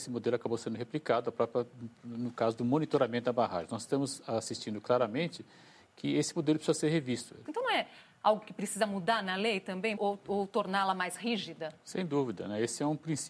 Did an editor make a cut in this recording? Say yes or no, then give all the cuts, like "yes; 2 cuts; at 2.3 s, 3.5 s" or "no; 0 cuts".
yes; 2 cuts; at 7.5 s, 10.0 s